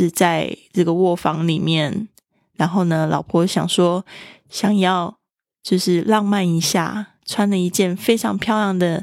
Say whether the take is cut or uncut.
uncut